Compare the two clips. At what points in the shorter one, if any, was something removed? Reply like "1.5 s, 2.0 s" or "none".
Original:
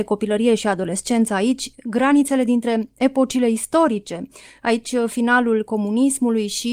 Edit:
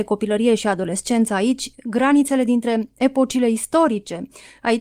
none